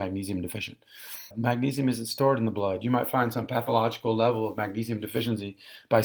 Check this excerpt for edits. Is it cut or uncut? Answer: cut